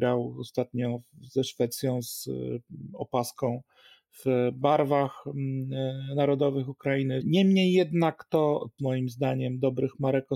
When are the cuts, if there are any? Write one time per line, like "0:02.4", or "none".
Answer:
0:07.2
0:08.8